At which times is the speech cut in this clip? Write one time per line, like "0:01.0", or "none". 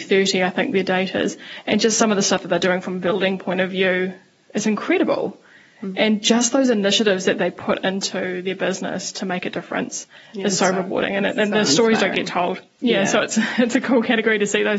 none